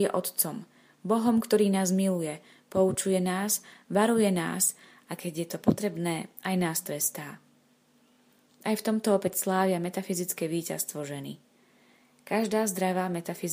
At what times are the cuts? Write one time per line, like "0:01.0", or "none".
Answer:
none